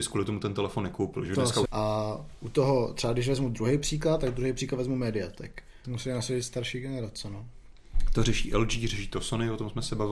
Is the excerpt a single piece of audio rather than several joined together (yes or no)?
no